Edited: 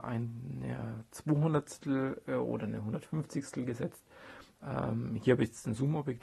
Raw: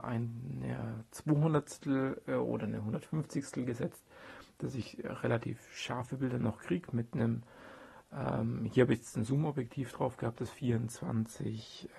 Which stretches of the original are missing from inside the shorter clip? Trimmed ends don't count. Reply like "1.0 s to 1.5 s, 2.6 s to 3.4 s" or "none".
4.6 s to 8.0 s